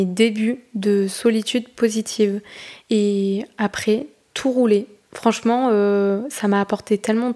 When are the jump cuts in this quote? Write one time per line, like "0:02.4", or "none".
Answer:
0:02.8